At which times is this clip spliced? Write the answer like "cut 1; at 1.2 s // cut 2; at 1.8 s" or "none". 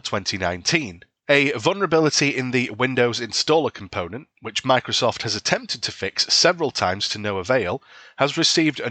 cut 1; at 1.2 s

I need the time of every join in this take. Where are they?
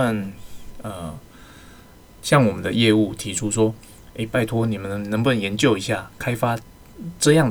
none

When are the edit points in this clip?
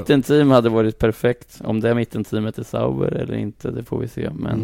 none

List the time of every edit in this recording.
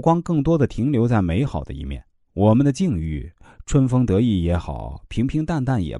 cut 1; at 2.3 s

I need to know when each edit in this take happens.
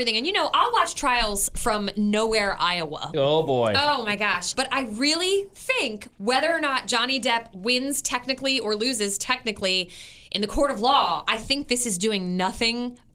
cut 1; at 3.1 s // cut 2; at 4.5 s

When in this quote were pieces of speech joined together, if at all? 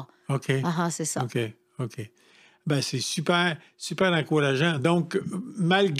none

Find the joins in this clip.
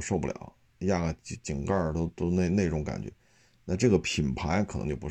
none

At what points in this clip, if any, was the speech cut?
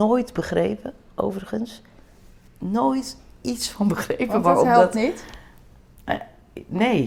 none

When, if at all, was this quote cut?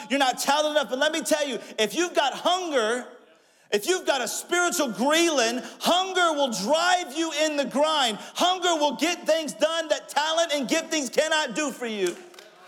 none

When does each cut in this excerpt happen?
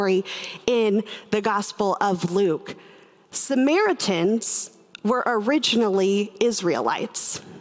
none

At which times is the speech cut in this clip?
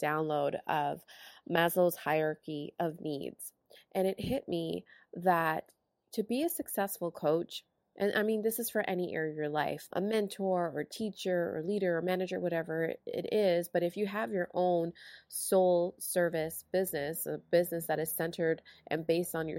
cut 1; at 9.9 s

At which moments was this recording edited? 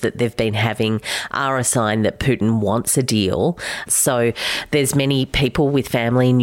cut 1; at 3.9 s

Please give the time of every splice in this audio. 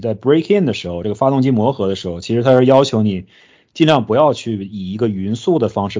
none

